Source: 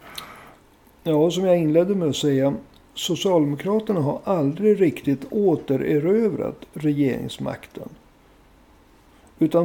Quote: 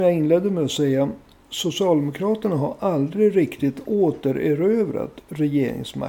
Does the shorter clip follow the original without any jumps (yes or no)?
yes